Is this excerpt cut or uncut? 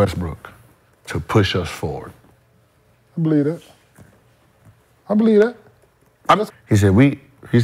cut